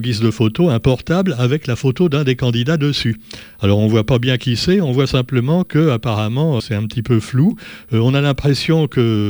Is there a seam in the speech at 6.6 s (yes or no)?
yes